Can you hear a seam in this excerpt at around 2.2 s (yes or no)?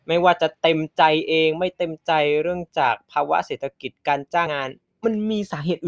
no